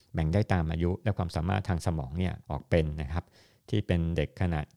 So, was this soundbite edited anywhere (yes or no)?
yes